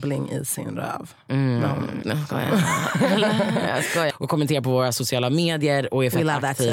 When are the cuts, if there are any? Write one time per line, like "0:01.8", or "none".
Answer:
0:02.0
0:04.1